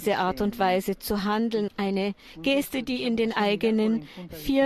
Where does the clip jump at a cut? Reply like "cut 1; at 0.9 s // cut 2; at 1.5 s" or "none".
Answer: cut 1; at 1.7 s